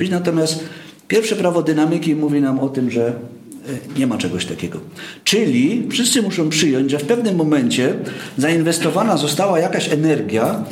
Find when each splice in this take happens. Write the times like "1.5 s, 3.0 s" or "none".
none